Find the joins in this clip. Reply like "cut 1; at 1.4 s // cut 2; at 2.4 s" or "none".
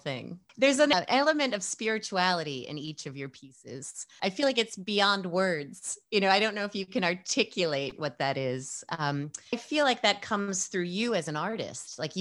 cut 1; at 4.2 s // cut 2; at 9.5 s